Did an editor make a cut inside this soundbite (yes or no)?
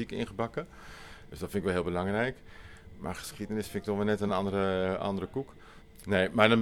no